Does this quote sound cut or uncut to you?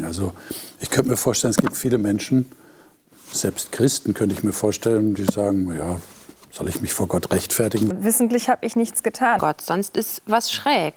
cut